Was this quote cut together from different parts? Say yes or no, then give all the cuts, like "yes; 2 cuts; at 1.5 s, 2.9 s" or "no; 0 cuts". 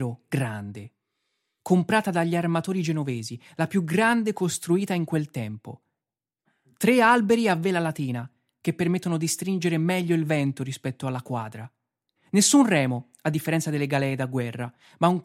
yes; 1 cut; at 12.2 s